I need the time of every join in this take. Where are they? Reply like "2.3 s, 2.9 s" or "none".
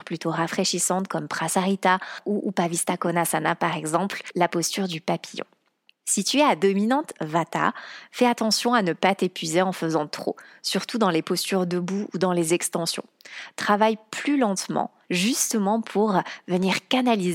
15.0 s